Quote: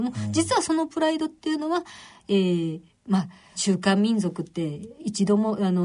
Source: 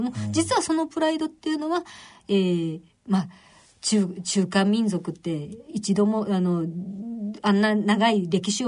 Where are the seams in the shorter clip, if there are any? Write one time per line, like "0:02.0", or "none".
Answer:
0:03.5